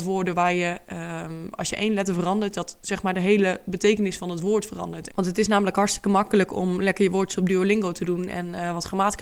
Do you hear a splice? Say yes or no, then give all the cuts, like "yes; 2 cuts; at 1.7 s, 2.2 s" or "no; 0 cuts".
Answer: yes; 1 cut; at 5.1 s